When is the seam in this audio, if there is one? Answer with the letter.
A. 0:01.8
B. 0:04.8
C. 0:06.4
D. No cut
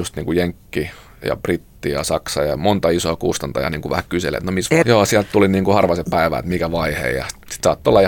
B